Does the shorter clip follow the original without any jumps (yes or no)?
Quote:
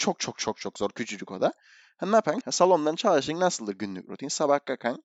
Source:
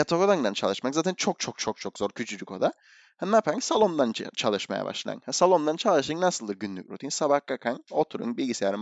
no